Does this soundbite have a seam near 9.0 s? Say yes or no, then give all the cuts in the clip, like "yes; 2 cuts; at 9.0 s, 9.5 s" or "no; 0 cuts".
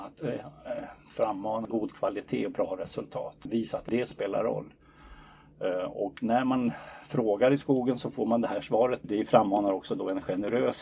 yes; 2 cuts; at 3.5 s, 9.0 s